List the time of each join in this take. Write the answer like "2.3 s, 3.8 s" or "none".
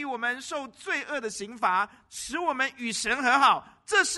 2.0 s